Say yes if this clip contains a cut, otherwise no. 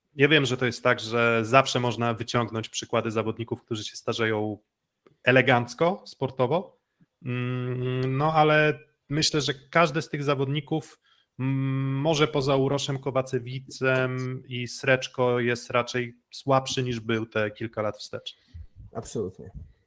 no